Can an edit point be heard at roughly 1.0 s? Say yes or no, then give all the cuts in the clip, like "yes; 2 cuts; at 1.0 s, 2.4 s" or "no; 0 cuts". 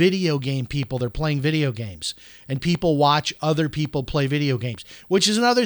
no; 0 cuts